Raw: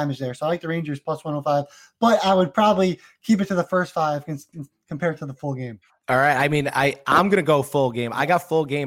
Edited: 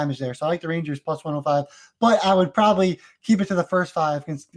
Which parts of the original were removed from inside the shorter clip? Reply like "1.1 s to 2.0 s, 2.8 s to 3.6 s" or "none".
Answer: none